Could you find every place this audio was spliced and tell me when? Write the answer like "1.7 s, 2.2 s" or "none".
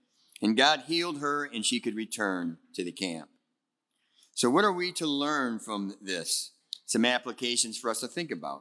none

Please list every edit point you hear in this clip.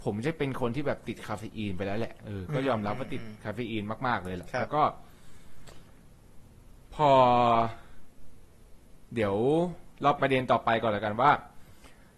10.2 s

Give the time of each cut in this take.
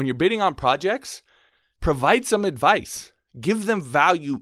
1.8 s

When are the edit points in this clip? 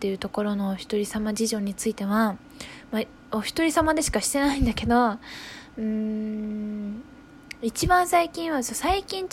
none

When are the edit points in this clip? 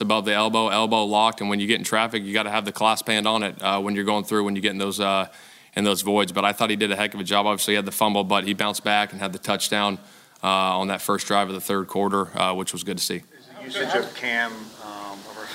none

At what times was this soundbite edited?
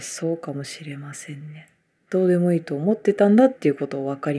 2.0 s

